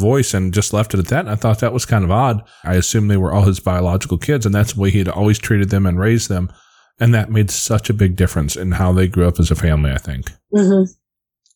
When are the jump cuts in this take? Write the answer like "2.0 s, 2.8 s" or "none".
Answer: 2.6 s